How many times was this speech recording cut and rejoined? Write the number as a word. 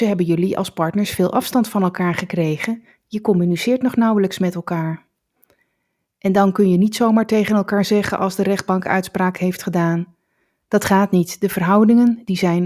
one